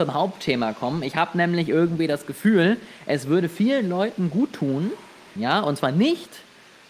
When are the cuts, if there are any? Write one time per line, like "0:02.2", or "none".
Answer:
0:05.4